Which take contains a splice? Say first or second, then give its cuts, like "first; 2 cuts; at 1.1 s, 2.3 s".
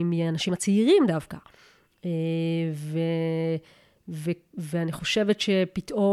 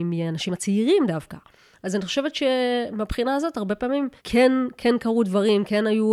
second; 2 cuts; at 1.7 s, 4.2 s